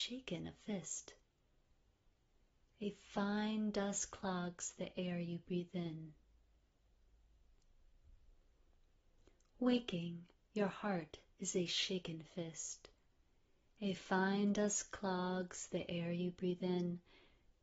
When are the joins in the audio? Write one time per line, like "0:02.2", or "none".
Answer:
none